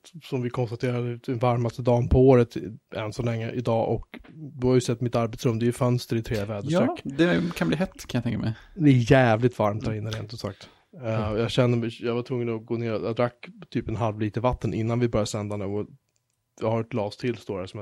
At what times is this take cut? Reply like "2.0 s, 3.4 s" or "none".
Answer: none